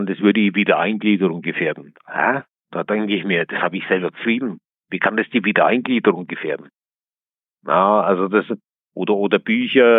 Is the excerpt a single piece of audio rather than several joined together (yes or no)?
yes